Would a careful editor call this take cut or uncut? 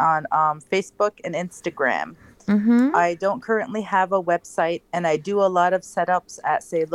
uncut